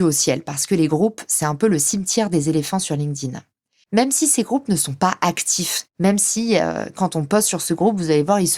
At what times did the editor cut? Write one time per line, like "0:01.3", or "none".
0:03.8